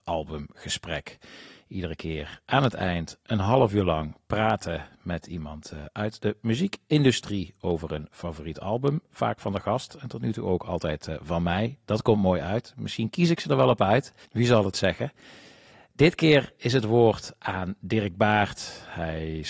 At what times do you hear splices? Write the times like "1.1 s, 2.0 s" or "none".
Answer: none